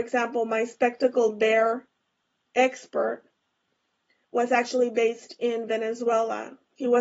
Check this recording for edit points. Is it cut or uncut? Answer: uncut